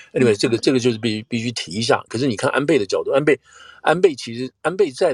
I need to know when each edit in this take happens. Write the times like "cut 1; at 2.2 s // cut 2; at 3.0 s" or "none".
cut 1; at 2.1 s